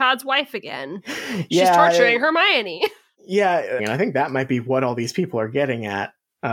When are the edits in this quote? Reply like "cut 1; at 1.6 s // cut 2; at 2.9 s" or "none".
cut 1; at 3.8 s